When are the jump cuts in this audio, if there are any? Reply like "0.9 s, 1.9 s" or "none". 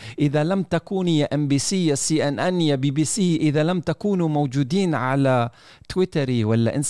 none